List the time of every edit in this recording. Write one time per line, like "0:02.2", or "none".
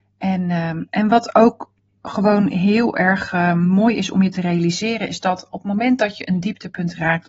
none